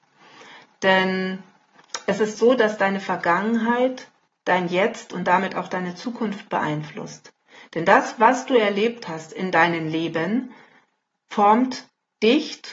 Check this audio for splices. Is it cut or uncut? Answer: uncut